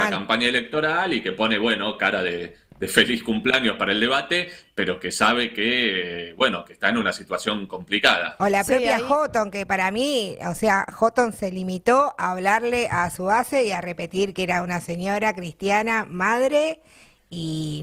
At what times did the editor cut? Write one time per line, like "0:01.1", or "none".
none

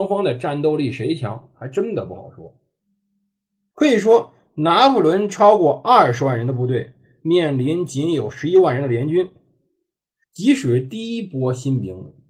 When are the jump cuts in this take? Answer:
0:03.7
0:10.2

